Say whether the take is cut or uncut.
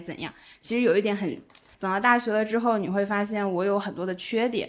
cut